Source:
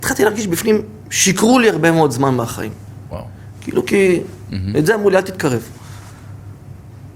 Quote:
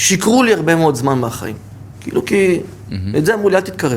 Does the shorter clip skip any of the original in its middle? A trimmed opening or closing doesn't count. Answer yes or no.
yes